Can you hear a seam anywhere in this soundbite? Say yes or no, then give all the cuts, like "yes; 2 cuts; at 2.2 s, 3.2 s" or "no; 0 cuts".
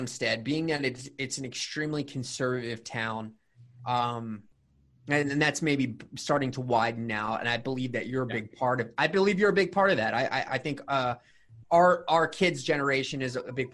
yes; 2 cuts; at 10.5 s, 11.6 s